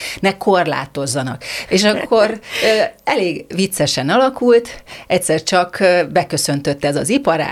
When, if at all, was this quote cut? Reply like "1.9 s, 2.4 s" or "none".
1.7 s